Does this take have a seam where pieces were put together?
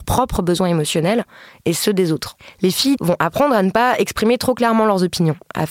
yes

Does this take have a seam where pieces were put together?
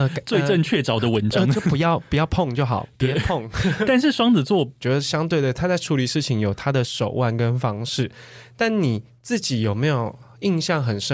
yes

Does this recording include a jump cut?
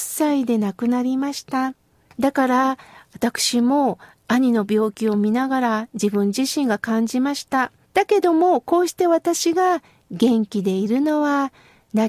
yes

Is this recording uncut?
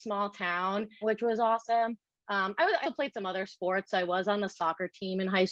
no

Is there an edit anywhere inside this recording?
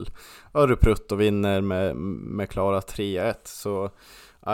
no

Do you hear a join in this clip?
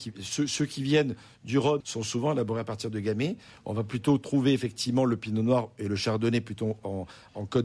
yes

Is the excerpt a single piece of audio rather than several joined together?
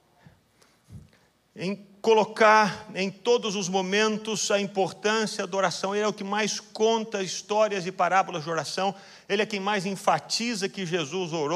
yes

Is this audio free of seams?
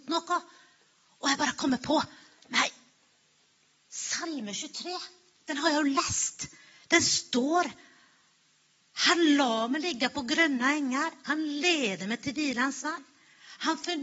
yes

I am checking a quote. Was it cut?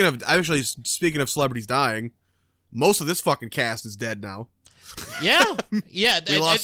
no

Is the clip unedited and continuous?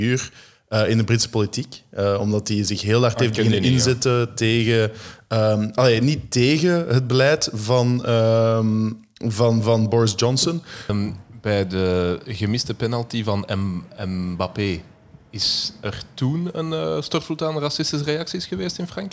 no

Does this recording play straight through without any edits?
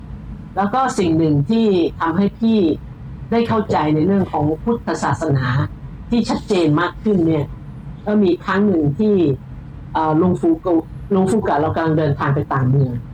no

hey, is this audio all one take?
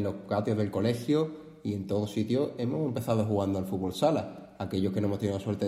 yes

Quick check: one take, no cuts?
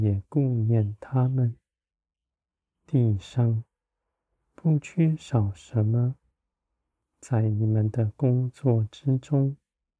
yes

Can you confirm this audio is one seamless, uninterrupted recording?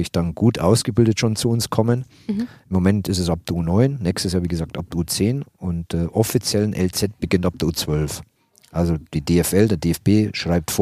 yes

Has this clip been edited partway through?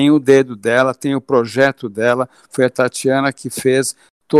no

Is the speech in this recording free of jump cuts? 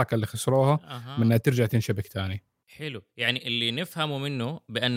yes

